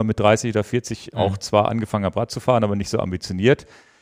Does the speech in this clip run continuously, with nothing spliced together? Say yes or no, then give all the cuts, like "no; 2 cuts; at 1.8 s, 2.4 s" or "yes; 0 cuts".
yes; 0 cuts